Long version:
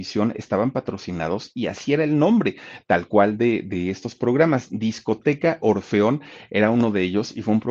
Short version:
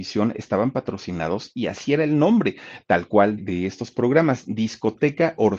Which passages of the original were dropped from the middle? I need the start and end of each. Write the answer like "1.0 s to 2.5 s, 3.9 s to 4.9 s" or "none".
3.4 s to 3.6 s